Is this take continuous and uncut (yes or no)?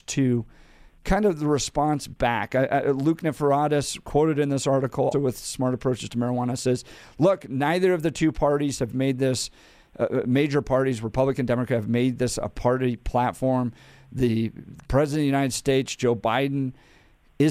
no